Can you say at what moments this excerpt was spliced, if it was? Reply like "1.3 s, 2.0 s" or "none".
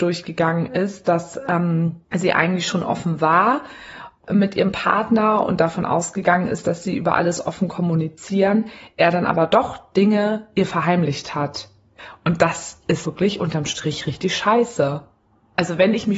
2.0 s, 13.0 s